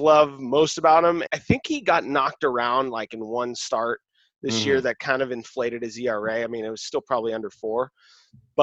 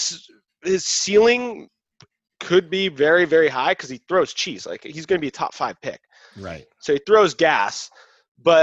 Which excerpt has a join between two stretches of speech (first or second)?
first